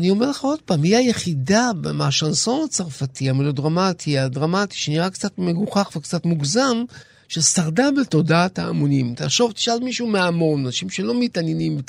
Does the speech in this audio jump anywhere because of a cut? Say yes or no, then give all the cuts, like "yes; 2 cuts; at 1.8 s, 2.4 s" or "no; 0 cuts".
no; 0 cuts